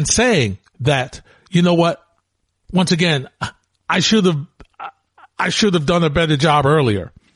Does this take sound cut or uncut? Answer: uncut